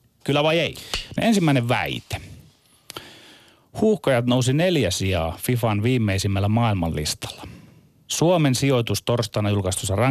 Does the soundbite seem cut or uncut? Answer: cut